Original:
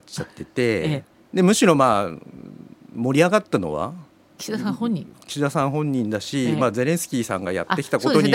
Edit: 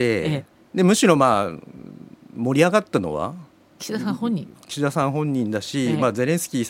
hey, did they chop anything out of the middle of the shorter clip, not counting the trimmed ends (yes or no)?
no